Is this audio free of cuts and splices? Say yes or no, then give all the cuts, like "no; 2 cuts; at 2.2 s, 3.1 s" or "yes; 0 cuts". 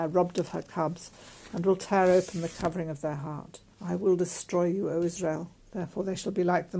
no; 2 cuts; at 3.7 s, 5.5 s